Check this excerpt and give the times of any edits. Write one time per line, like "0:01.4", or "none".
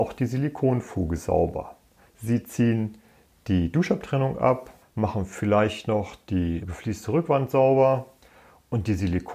0:02.1
0:04.8
0:06.6